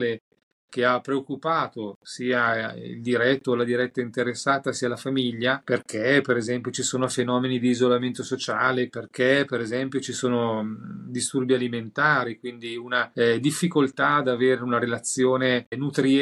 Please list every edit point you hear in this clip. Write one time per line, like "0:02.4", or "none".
0:08.9